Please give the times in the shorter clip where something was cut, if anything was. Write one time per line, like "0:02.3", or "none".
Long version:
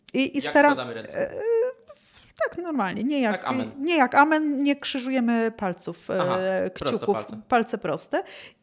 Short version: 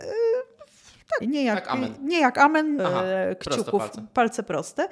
0:01.2
0:02.8